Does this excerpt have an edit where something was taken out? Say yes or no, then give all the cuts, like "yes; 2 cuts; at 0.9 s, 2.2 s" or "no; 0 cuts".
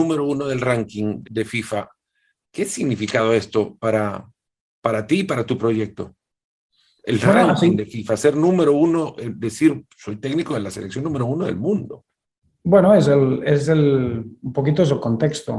yes; 1 cut; at 1.2 s